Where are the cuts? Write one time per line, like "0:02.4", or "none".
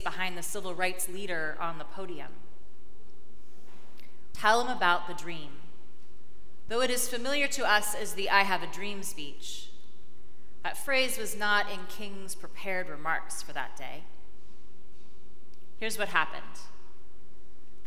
0:04.3
0:06.7